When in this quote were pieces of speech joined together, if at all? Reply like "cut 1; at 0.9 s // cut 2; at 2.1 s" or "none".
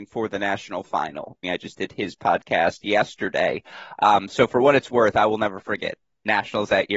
cut 1; at 1.4 s